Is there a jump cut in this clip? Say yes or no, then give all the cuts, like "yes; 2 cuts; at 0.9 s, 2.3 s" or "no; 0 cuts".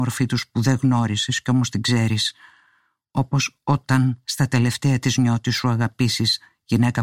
no; 0 cuts